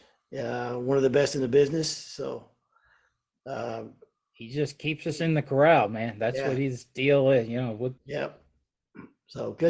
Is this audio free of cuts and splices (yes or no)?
no